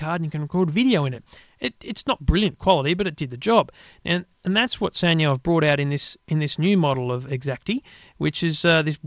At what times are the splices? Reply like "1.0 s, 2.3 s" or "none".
none

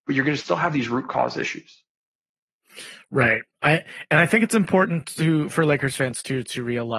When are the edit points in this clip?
none

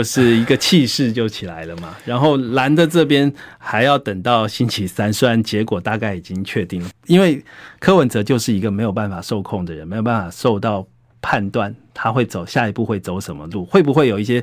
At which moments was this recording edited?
6.9 s

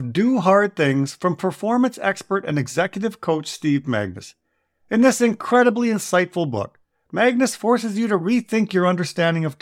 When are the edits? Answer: none

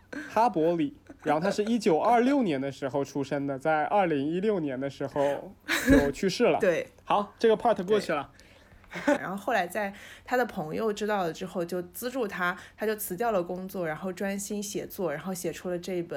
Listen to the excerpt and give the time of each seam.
9.2 s

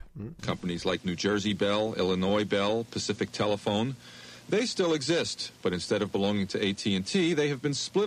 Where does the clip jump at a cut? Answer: none

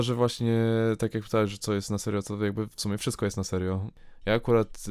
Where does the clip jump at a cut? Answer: 2.2 s

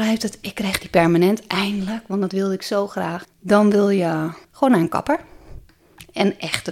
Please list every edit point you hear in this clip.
3.2 s, 4.4 s

